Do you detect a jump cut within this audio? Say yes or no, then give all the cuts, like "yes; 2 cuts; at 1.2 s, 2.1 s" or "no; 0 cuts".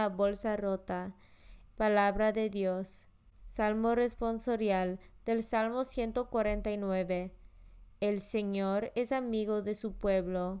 yes; 1 cut; at 1.6 s